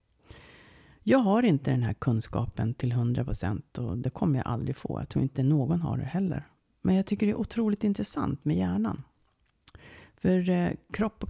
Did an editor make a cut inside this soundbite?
no; 0 cuts

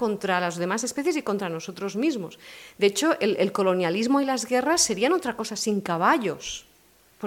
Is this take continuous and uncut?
yes; 0 cuts

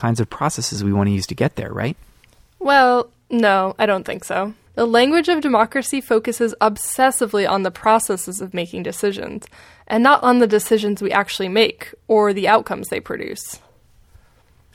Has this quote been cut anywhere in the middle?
yes; 1 cut; at 4.7 s

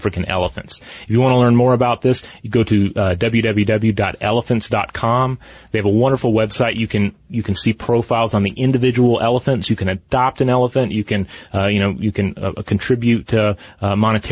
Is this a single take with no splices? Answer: yes; 0 cuts

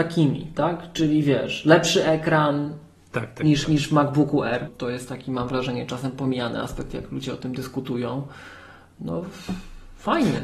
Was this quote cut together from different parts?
yes; 1 cut; at 4.7 s

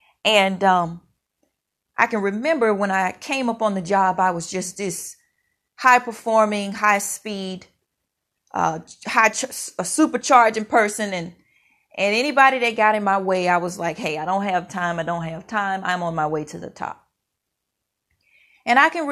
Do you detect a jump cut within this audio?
no; 0 cuts

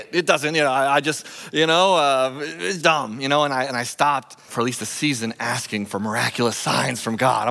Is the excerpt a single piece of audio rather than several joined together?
no; 2 cuts; at 2.8 s, 4.5 s

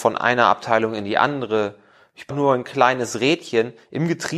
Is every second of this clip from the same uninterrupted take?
no; 1 cut; at 2.3 s

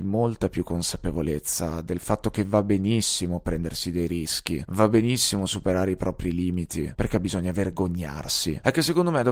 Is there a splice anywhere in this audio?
yes; 2 cuts; at 4.7 s, 6.9 s

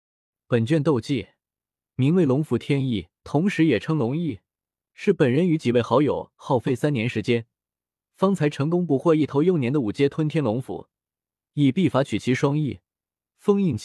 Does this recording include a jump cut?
yes; 1 cut; at 3.2 s

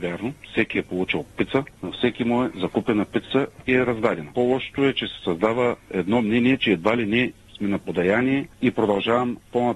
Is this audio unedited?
yes; 0 cuts

